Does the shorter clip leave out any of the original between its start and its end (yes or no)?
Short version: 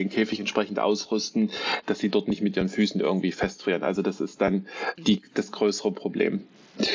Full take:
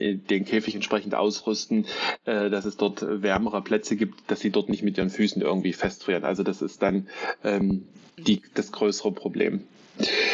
yes